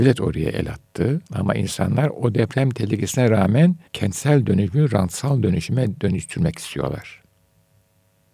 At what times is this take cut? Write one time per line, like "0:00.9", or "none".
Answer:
0:01.3
0:03.9